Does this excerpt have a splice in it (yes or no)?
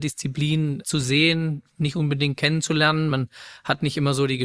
no